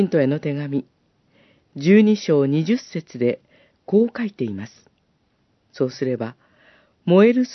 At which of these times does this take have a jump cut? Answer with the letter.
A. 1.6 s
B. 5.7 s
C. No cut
B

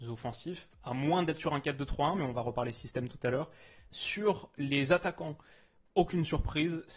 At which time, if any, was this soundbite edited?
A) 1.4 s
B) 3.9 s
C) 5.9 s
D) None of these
B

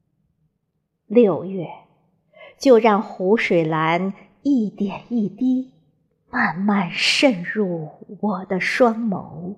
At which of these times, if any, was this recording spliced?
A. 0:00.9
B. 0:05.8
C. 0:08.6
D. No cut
A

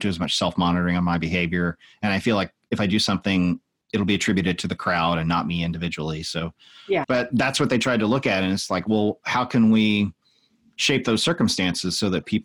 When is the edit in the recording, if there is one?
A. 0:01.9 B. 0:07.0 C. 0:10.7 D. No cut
B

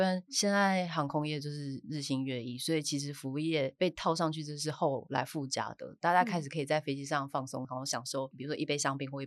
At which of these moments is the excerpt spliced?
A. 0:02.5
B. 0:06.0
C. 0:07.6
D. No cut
D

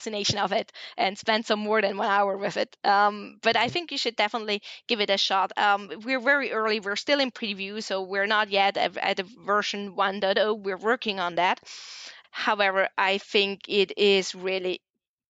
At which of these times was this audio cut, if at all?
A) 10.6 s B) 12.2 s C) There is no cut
B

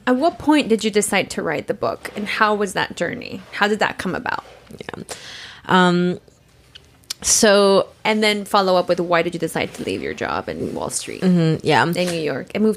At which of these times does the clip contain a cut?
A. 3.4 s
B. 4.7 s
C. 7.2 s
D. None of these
D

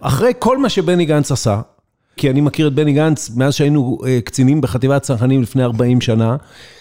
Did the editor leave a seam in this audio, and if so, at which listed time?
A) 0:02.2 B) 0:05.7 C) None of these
A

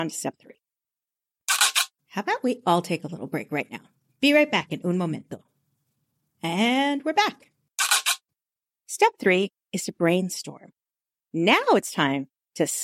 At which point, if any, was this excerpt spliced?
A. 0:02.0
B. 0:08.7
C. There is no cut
C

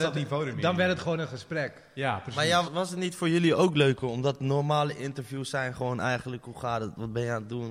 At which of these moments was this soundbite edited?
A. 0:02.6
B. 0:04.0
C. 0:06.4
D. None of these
A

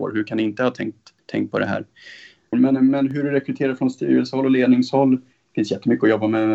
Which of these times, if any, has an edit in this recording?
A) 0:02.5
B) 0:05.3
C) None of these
A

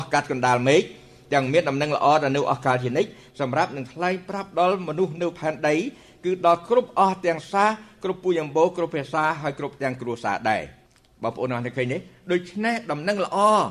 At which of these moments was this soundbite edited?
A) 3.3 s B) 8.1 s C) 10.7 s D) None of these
D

